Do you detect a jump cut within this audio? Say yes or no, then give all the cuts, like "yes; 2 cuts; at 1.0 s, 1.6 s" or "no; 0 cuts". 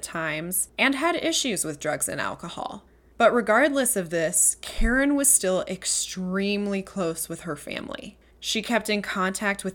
no; 0 cuts